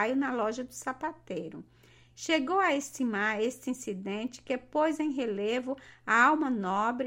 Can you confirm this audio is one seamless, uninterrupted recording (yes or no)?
yes